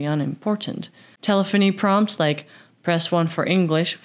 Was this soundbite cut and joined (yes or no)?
no